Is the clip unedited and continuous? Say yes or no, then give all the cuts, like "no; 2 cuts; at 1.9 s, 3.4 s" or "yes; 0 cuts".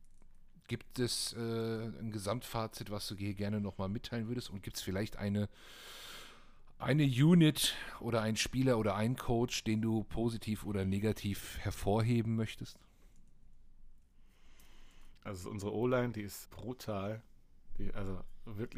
no; 2 cuts; at 15.3 s, 16.4 s